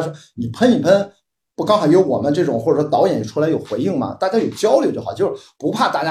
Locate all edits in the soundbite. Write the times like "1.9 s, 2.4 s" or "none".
none